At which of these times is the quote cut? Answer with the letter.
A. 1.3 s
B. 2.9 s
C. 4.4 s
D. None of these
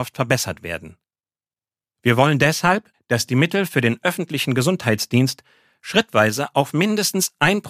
B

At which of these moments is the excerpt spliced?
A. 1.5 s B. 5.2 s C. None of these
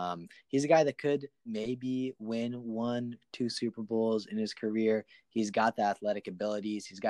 A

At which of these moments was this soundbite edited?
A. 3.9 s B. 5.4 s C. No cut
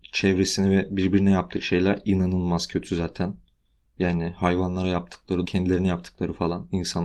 B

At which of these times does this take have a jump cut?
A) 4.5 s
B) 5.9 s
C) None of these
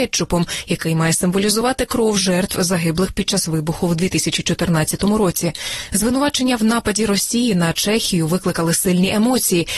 C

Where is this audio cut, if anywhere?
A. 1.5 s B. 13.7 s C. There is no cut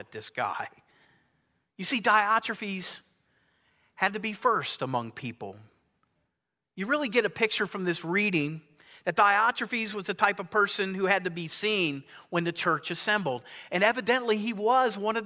C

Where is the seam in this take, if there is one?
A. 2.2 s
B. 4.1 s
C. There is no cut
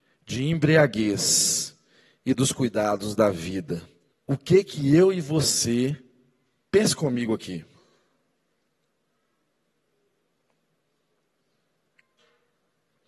B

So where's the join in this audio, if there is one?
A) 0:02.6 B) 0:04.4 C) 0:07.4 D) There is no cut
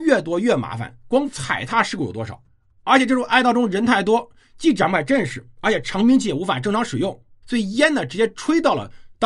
C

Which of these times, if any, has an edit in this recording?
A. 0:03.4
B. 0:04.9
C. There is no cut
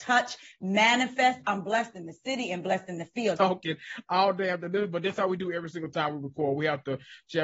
A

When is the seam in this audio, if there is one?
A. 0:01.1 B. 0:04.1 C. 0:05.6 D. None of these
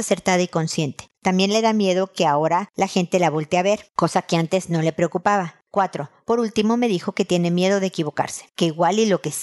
A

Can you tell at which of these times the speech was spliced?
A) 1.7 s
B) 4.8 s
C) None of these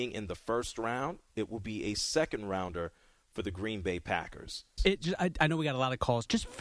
B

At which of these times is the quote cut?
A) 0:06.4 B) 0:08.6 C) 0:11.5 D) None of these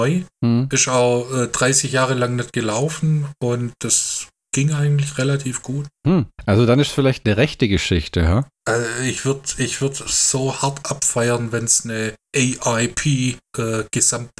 D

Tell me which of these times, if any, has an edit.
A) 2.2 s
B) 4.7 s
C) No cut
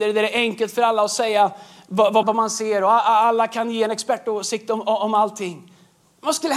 A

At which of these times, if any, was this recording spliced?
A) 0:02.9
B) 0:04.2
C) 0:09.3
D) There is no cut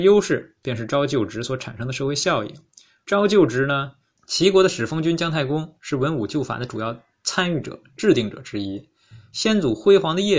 B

